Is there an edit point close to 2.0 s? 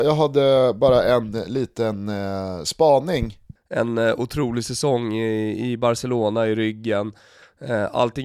no; 1 cut; at 3.6 s

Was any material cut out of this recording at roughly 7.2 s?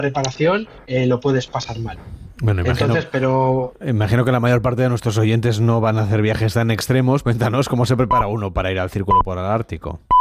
yes; 1 cut; at 7.2 s

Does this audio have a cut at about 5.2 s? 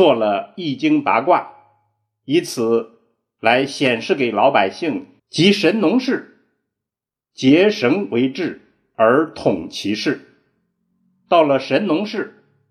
yes; 1 cut; at 5.2 s

